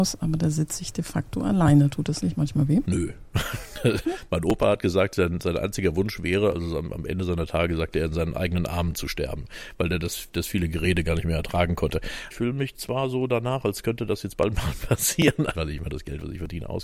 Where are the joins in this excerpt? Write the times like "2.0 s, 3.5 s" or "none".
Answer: 4.0 s, 12.3 s, 15.5 s